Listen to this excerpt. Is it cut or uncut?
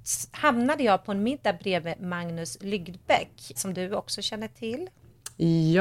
cut